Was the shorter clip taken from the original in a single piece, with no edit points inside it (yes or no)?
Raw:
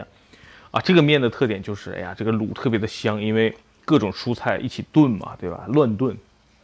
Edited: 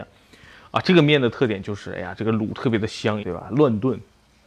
no